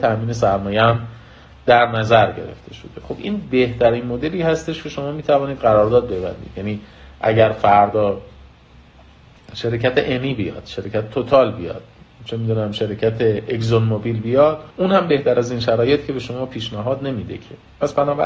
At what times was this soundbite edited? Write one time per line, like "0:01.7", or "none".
0:14.7